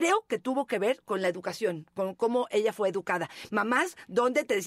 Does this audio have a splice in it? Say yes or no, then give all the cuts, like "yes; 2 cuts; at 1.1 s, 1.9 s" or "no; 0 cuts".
no; 0 cuts